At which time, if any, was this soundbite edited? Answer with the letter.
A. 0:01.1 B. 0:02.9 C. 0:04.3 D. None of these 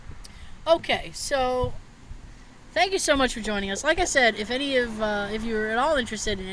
D